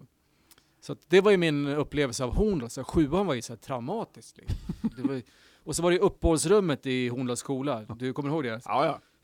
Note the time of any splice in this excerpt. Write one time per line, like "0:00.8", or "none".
none